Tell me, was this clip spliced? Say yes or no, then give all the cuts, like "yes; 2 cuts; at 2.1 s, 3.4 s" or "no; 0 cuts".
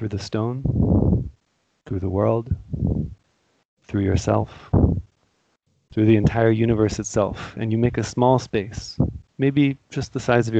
no; 0 cuts